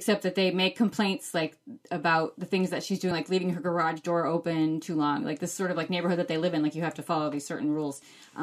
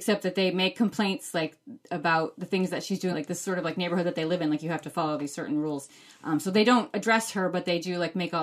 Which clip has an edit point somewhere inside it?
second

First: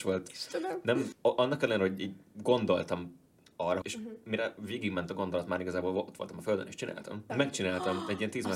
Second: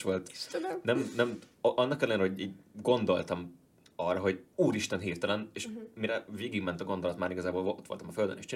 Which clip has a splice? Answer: first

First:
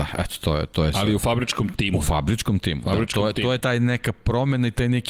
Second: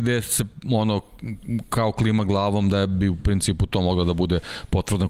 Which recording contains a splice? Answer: first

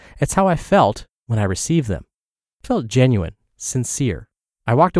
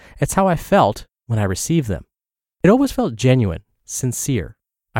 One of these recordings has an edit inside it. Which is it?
first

